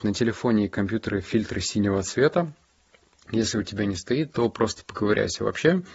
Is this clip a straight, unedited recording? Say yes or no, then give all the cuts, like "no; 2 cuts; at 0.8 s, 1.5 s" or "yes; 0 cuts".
yes; 0 cuts